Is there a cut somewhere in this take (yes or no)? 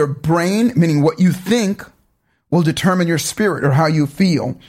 no